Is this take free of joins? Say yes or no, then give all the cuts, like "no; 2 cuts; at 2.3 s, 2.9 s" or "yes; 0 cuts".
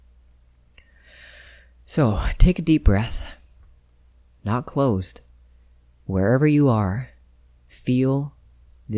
no; 1 cut; at 4.4 s